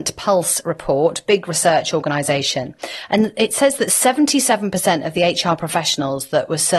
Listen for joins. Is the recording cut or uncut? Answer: uncut